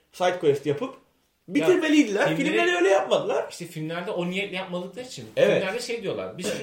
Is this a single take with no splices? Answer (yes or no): yes